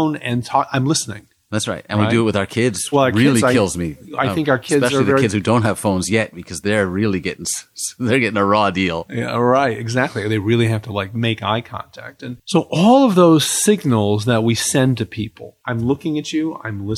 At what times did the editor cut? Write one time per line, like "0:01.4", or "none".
0:02.9

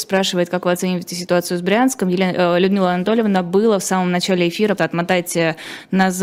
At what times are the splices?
0:04.8

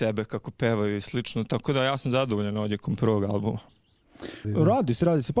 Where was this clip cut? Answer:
0:04.4

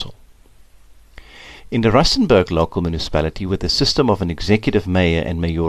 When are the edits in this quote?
none

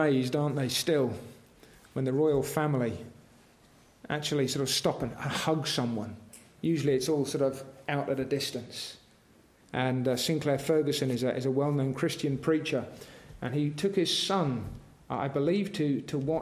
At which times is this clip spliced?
0:09.6

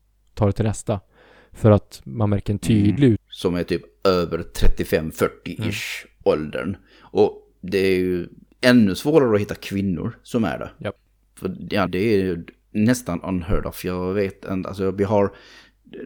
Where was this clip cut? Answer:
0:03.2
0:11.9

